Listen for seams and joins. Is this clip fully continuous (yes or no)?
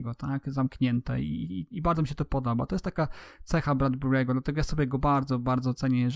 yes